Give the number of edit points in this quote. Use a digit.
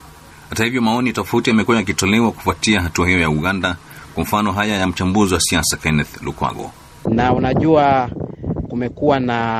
2